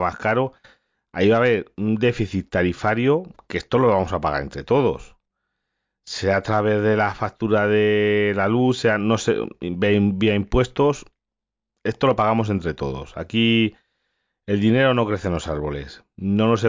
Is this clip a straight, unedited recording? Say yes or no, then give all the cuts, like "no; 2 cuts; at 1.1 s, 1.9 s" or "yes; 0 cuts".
yes; 0 cuts